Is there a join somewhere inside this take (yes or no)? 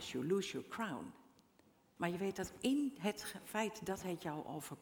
yes